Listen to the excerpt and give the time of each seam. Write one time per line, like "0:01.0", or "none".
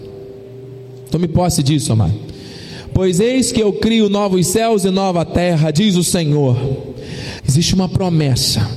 0:07.4